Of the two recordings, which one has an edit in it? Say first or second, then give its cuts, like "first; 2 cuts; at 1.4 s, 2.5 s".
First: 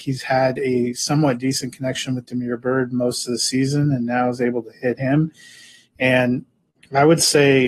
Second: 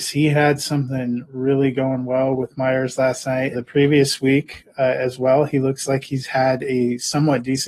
second; 1 cut; at 3.5 s